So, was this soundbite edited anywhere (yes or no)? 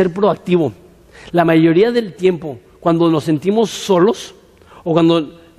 no